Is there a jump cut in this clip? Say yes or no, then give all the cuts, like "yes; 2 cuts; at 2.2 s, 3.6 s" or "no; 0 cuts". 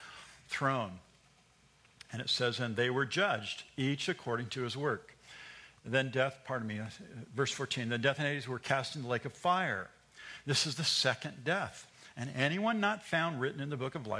no; 0 cuts